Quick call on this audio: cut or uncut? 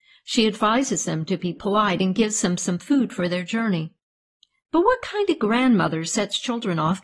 uncut